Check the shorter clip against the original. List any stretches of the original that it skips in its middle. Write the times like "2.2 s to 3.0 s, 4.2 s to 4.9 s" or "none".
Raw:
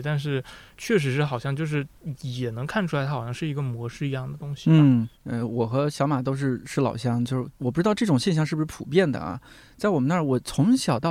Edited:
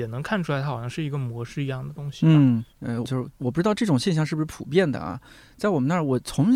5.5 s to 7.2 s

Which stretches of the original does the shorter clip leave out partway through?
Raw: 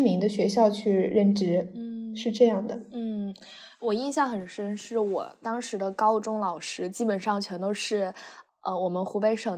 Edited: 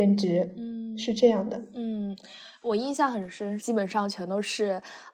4.8 s to 6.9 s

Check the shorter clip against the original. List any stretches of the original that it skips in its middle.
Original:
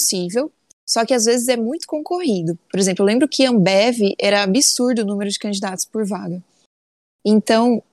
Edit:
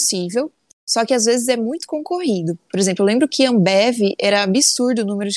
none

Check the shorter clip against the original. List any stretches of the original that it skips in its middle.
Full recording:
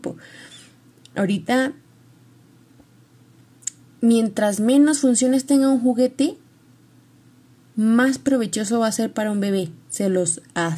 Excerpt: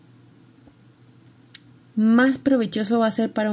3.9 s to 7.6 s

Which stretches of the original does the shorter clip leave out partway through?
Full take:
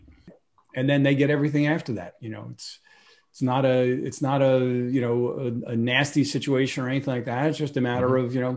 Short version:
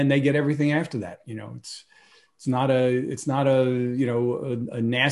none

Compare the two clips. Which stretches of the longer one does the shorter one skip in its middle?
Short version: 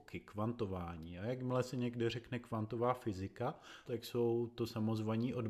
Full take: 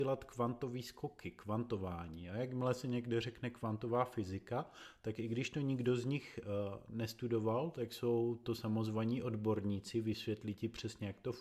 5.0 s to 7.7 s

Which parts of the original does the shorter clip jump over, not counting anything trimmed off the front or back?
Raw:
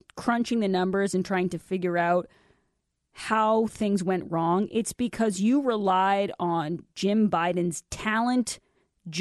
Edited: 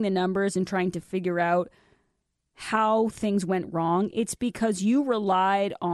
none

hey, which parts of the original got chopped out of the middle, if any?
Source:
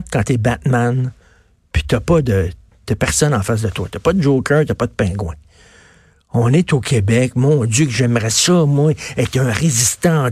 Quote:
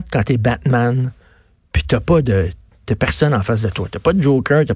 none

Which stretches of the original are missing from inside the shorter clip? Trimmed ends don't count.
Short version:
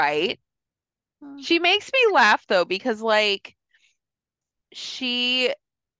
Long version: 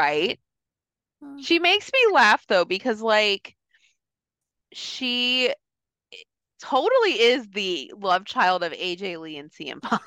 none

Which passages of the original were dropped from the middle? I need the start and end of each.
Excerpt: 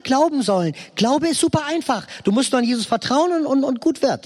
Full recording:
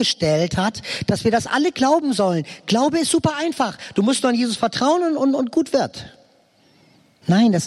none

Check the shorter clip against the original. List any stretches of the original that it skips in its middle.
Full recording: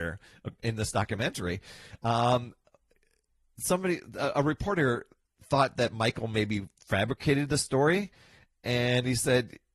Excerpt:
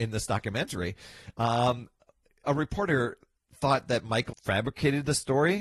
3.1 s to 4.3 s, 6.2 s to 6.8 s

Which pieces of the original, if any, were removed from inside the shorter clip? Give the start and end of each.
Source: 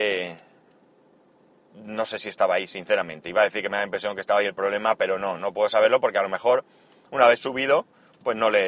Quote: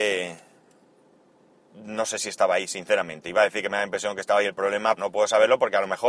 5.0 s to 5.4 s

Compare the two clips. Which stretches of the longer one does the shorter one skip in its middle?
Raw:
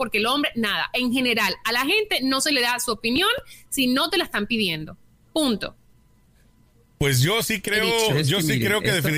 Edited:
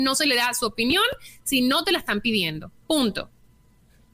5.1 s to 5.3 s

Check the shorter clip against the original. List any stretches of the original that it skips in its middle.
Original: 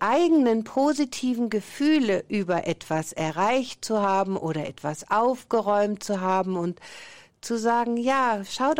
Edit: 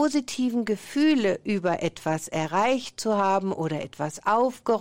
none

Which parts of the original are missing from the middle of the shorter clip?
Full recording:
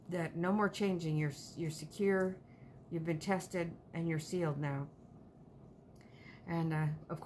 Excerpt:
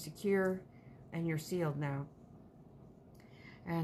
2.9 s to 3.9 s

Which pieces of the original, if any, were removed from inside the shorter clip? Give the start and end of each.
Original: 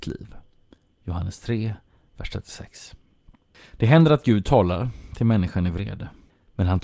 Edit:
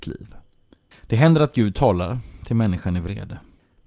0.9 s to 3.6 s

